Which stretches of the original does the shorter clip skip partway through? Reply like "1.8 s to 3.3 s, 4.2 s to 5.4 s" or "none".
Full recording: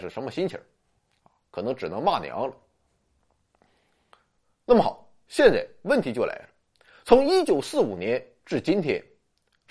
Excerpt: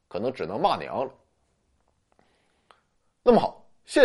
none